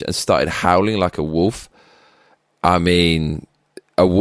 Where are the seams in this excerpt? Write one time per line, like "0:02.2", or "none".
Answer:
none